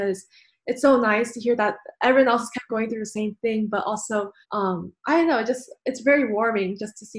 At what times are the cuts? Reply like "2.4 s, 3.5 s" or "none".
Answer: 4.4 s